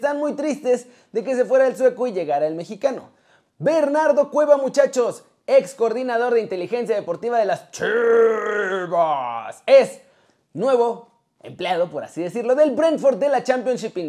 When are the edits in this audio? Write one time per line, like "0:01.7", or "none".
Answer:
none